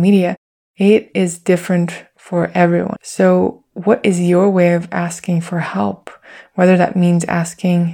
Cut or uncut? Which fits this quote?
cut